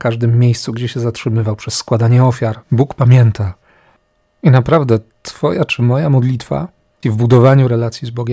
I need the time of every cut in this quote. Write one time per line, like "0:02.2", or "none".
0:02.6
0:07.0